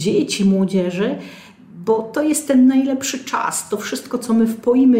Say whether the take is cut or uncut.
uncut